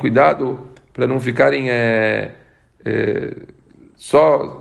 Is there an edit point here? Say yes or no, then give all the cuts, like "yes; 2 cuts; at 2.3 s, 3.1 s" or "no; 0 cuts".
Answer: no; 0 cuts